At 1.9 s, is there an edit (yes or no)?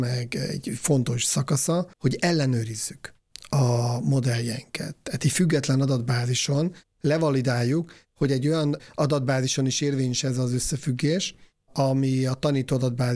yes